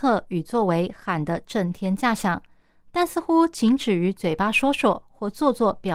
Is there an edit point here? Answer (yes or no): no